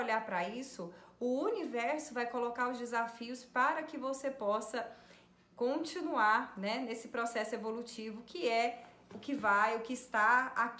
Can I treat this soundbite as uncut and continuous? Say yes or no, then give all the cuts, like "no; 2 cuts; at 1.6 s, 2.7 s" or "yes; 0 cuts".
yes; 0 cuts